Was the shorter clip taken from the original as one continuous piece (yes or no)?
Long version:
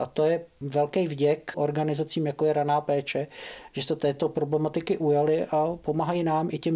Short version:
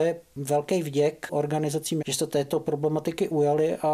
no